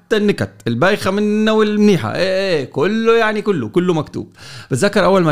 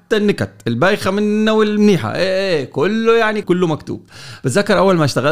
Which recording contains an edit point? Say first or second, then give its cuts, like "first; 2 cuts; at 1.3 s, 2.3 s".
second; 1 cut; at 3.4 s